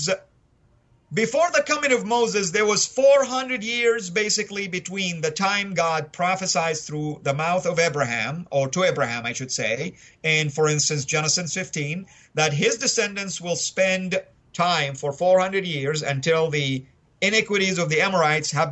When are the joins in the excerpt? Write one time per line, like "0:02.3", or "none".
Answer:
none